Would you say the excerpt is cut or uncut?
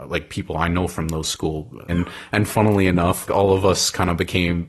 cut